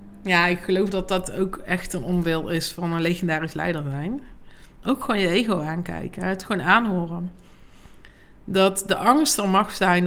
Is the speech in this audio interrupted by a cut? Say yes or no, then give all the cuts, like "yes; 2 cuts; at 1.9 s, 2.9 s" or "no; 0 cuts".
no; 0 cuts